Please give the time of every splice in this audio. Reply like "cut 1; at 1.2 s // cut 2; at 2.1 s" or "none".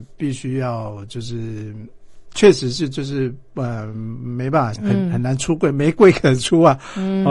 cut 1; at 2.3 s // cut 2; at 4.8 s